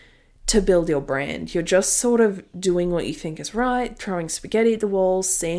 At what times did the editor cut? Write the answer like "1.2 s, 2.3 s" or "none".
none